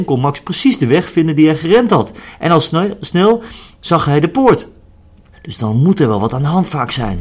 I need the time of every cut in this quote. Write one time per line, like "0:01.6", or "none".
0:05.3